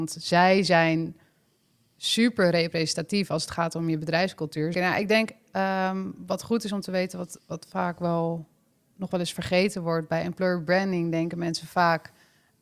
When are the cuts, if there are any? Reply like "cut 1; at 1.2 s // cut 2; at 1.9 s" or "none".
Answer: cut 1; at 4.7 s